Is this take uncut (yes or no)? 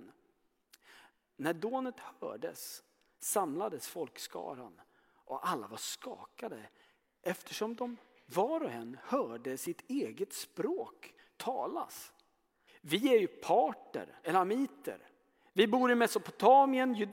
no